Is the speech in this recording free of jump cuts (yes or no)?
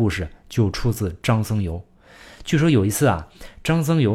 yes